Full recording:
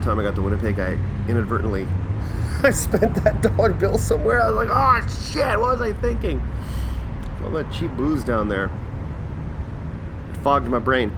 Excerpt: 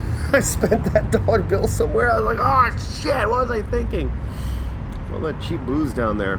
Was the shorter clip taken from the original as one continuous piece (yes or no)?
yes